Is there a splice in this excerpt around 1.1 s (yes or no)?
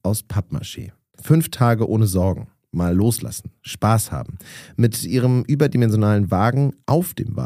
yes